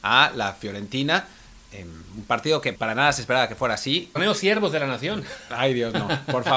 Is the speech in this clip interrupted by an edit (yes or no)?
yes